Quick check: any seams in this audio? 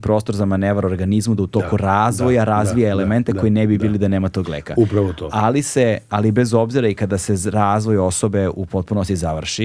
no; 0 cuts

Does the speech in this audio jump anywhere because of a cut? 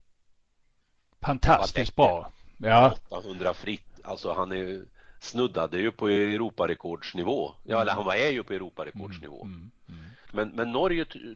yes; 1 cut; at 10.3 s

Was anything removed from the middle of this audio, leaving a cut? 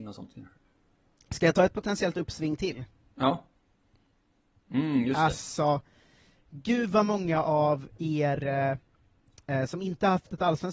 yes; 1 cut; at 4.6 s

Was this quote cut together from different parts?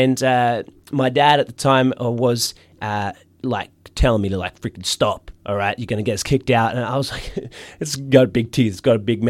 no; 0 cuts

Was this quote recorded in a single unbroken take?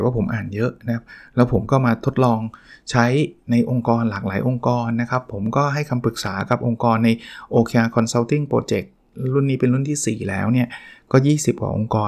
yes; 0 cuts

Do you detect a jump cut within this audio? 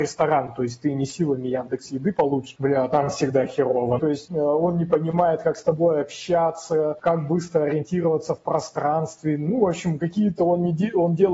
yes; 1 cut; at 4.0 s

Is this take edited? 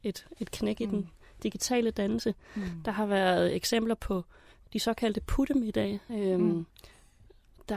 yes; 1 cut; at 6.1 s

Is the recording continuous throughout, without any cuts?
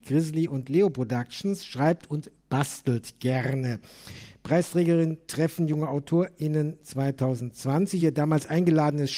yes; 0 cuts

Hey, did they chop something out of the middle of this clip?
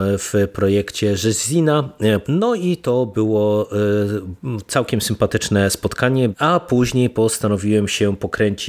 yes; 2 cuts; at 2.2 s, 6.3 s

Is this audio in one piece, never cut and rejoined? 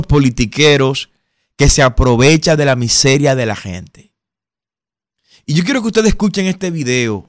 yes; 0 cuts

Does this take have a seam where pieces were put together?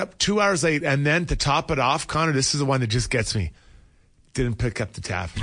no; 0 cuts

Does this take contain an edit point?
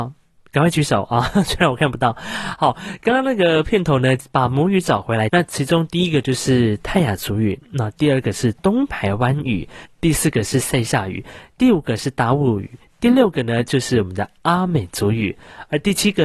yes; 2 cuts; at 5.3 s, 9.9 s

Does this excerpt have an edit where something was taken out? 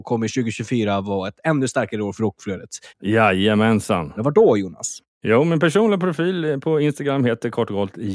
yes; 2 cuts; at 2.9 s, 4.2 s

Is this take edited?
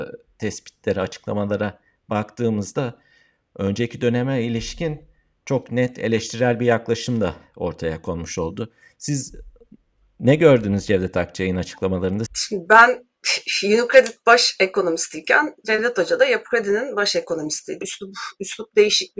yes; 2 cuts; at 12.3 s, 17.8 s

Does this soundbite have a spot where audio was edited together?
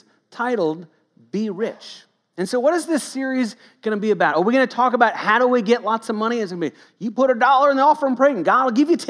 no; 0 cuts

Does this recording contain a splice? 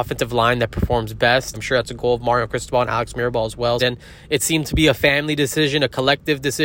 yes; 2 cuts; at 1.5 s, 3.8 s

